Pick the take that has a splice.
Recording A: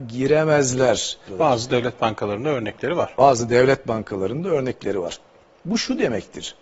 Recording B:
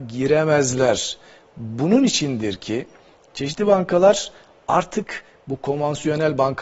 A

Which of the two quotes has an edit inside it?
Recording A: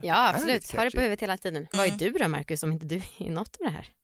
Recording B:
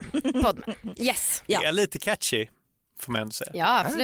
A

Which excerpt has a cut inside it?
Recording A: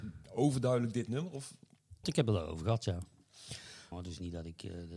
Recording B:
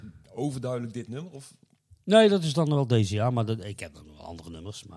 A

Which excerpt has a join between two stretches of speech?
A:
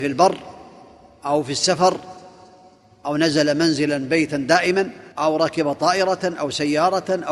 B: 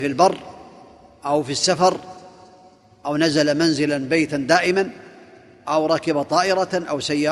A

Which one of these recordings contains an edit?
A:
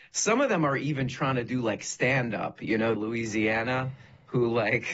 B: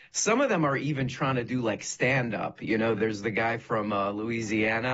A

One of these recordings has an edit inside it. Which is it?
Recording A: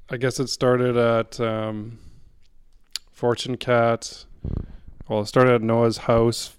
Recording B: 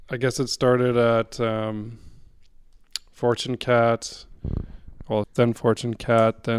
B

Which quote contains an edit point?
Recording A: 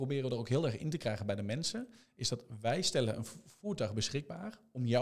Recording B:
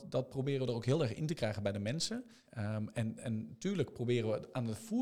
B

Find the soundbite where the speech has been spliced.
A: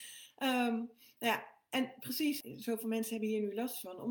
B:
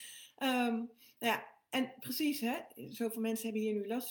A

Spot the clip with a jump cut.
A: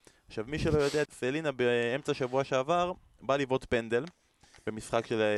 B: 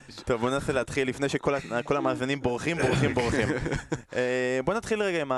A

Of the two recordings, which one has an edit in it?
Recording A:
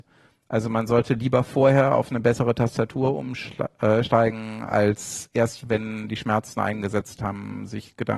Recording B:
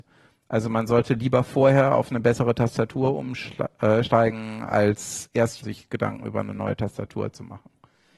B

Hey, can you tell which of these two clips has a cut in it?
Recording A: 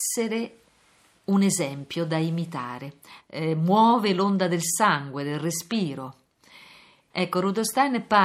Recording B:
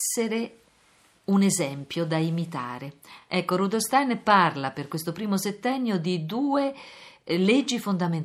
A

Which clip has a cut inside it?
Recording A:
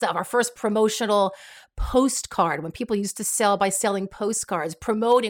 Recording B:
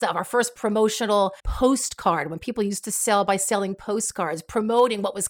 B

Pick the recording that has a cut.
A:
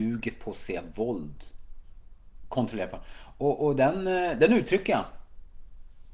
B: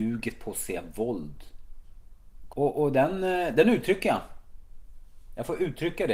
B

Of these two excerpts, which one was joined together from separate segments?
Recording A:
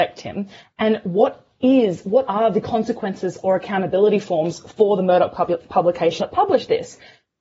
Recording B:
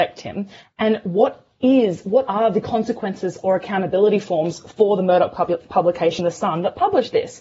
A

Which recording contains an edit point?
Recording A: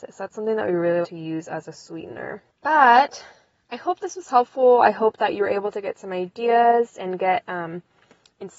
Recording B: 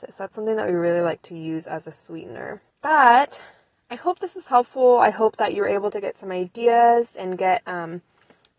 A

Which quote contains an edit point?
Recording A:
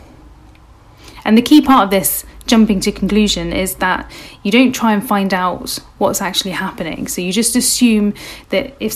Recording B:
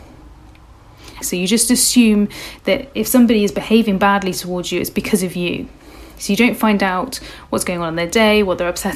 B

